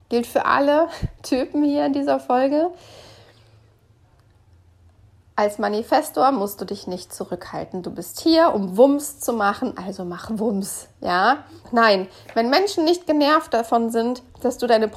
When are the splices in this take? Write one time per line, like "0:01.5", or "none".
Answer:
0:11.6